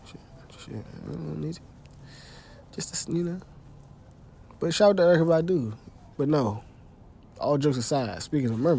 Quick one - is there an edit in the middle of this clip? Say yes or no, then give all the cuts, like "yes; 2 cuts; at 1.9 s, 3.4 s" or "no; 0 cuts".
yes; 1 cut; at 6.2 s